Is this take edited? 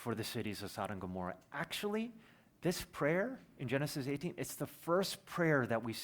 no; 0 cuts

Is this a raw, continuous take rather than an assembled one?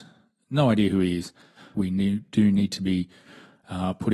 no; 1 cut; at 1.7 s

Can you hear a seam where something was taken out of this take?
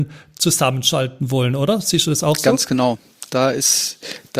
no; 0 cuts

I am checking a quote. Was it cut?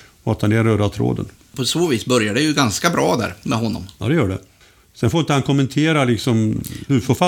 no; 0 cuts

